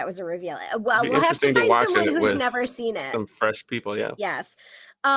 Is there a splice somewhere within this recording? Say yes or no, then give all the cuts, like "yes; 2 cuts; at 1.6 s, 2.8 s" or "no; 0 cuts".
no; 0 cuts